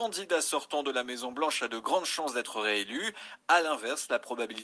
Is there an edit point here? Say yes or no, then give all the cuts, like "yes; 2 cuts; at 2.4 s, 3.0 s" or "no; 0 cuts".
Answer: no; 0 cuts